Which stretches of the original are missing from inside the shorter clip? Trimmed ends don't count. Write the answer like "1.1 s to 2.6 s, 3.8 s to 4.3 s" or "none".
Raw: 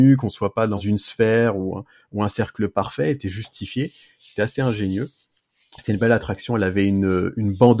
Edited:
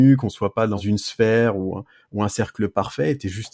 none